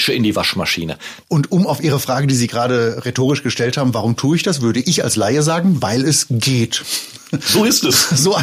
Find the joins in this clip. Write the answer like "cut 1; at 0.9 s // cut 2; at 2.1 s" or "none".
cut 1; at 1.2 s